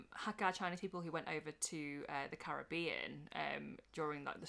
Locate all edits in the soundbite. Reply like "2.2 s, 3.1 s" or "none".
none